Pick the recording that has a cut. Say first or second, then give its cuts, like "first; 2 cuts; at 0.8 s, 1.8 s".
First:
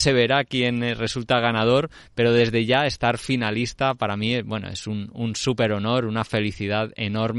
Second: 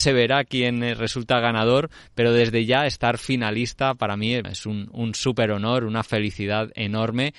second; 1 cut; at 4.4 s